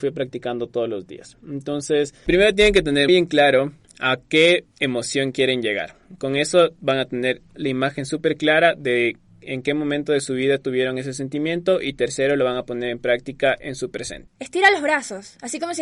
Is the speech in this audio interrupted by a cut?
yes; 3 cuts; at 3.1 s, 7.5 s, 14.3 s

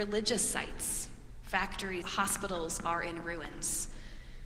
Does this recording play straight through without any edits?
no; 1 cut; at 2.0 s

